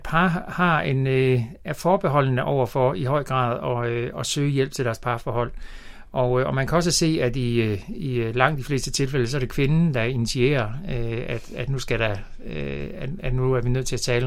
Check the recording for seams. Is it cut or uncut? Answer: uncut